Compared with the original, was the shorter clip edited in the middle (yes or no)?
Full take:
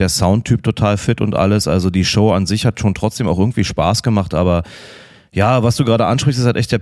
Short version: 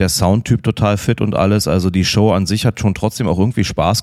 no